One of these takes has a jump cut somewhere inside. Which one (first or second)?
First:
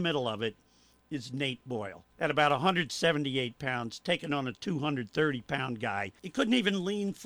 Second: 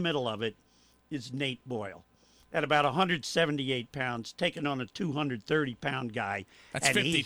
first